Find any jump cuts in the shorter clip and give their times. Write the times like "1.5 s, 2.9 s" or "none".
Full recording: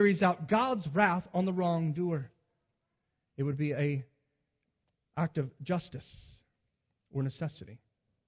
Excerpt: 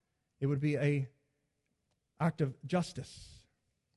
none